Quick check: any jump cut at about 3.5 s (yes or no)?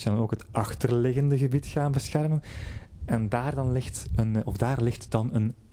no